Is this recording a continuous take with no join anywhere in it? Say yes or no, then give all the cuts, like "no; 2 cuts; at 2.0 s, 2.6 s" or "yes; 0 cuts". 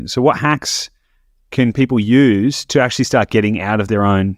yes; 0 cuts